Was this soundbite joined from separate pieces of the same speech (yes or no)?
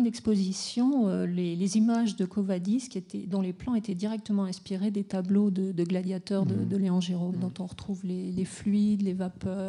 yes